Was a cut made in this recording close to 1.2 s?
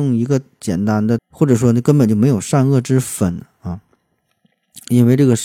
yes; 1 cut; at 1.2 s

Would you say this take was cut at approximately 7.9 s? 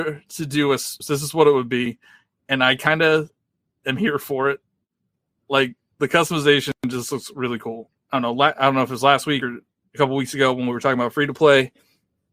yes; 2 cuts; at 1.0 s, 7.9 s

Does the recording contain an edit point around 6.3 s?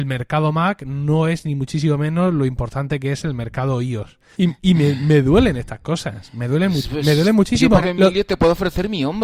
no; 2 cuts; at 4.3 s, 7.8 s

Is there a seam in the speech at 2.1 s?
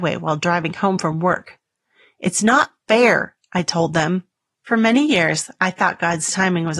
no; 1 cut; at 4.6 s

